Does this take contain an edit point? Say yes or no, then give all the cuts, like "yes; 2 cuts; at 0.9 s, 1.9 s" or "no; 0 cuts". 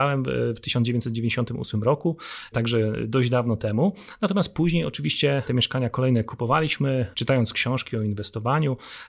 no; 0 cuts